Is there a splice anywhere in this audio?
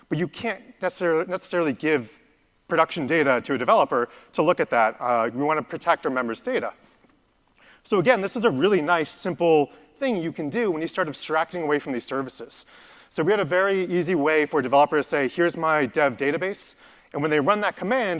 no; 0 cuts

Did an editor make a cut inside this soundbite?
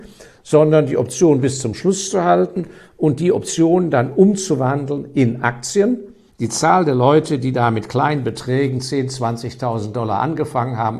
yes; 1 cut; at 6.3 s

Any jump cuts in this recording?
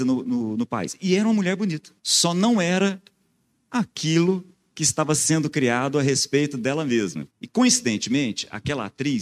yes; 2 cuts; at 2.0 s, 7.3 s

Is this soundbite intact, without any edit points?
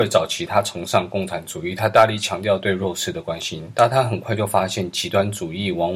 yes; 0 cuts

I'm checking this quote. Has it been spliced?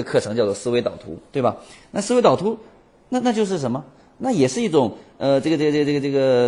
no; 0 cuts

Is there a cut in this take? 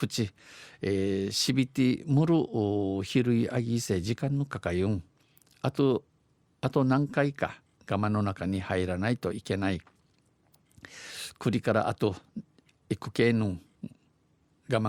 no; 0 cuts

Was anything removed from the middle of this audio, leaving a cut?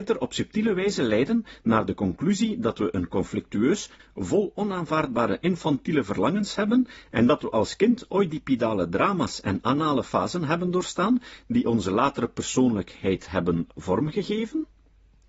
yes; 1 cut; at 4.0 s

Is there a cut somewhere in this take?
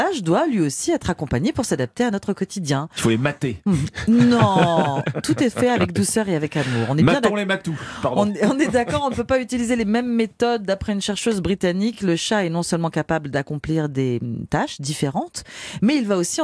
no; 0 cuts

